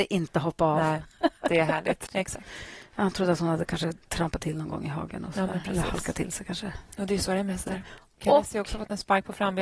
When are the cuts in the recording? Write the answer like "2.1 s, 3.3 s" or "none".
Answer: 2.1 s